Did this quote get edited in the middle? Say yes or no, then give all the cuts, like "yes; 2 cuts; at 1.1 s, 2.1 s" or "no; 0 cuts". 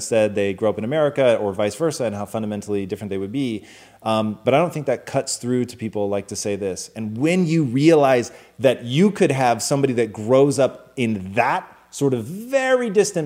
yes; 1 cut; at 6.9 s